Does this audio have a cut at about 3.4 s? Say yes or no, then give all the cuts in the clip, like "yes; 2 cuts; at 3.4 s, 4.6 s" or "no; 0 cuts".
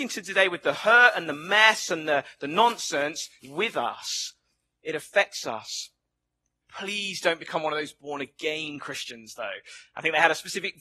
yes; 2 cuts; at 3.4 s, 6.6 s